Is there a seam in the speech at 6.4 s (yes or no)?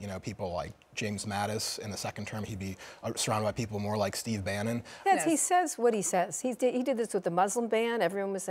no